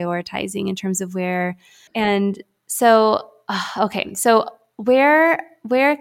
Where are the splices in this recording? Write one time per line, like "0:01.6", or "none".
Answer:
0:01.9

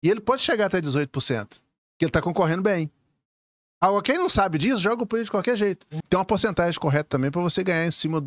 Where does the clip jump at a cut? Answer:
0:06.0

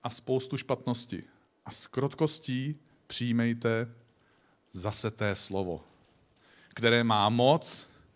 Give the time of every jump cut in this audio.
none

